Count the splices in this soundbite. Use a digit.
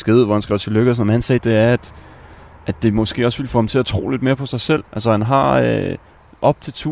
2